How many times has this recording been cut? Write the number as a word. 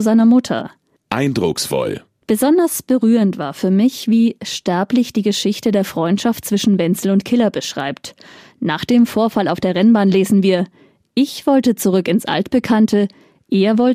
one